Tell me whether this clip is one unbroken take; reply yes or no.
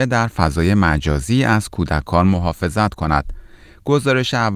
yes